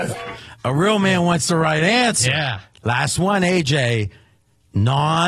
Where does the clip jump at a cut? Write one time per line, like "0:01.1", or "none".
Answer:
0:02.7